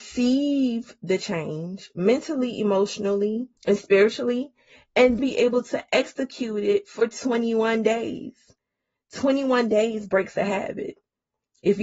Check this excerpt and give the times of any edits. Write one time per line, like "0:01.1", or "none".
0:03.6
0:05.2